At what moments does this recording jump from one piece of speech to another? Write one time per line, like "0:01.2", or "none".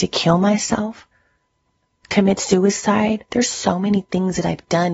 0:03.3